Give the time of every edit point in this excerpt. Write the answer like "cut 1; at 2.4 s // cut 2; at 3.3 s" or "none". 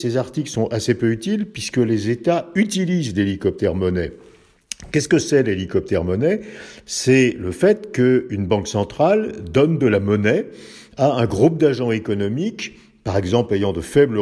none